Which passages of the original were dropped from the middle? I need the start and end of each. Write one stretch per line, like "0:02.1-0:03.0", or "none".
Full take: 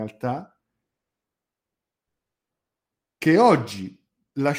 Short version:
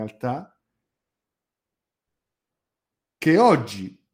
none